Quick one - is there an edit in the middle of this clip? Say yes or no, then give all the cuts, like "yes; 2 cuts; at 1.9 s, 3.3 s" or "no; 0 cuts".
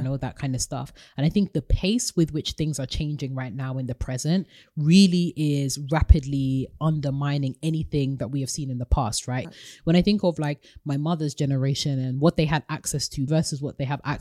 yes; 2 cuts; at 9.4 s, 13.3 s